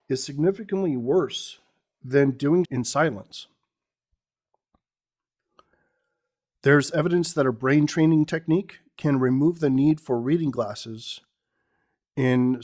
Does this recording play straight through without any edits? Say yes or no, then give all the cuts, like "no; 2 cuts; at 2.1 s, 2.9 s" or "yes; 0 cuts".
no; 1 cut; at 2.6 s